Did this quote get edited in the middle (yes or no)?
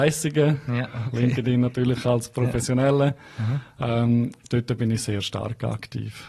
no